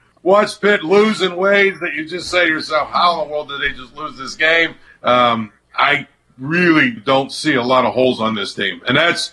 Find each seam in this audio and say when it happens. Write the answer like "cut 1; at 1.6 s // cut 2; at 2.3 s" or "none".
cut 1; at 4.9 s // cut 2; at 7.0 s